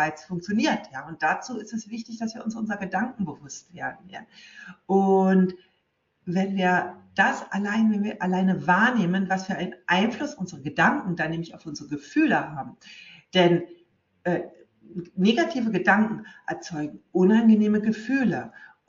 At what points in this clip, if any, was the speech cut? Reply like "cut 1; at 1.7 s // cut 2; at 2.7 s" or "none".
none